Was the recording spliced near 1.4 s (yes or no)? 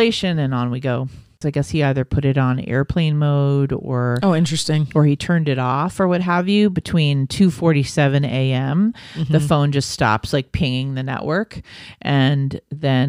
yes